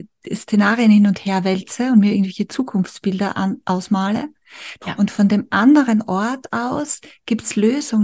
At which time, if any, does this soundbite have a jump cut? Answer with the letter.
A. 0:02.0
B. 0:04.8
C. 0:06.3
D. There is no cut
B